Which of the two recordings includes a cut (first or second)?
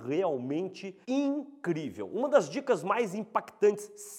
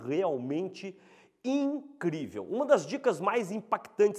first